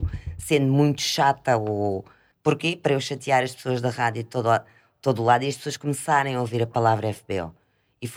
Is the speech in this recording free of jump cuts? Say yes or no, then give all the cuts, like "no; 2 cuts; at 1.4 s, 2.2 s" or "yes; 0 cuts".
no; 1 cut; at 2.3 s